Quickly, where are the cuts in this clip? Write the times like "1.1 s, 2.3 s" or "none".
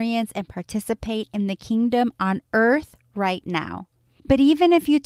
none